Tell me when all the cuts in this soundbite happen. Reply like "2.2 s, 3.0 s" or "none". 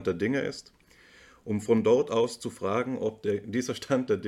none